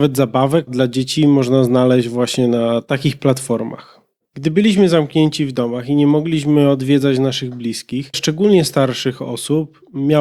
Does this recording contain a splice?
yes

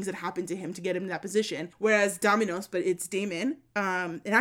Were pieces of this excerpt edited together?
no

